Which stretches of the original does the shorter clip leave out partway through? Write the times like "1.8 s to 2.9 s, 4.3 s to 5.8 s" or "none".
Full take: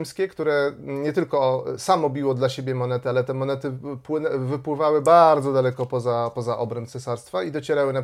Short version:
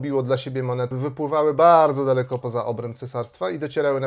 3.0 s to 4.4 s, 5.9 s to 6.3 s